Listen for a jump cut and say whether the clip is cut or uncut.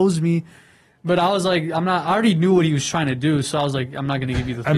uncut